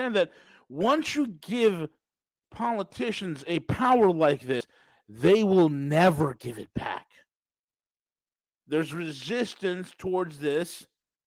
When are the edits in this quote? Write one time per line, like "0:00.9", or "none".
0:08.6